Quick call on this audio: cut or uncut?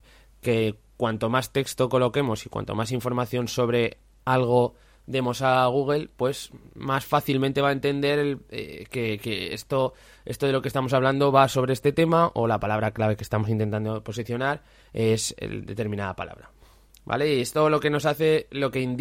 cut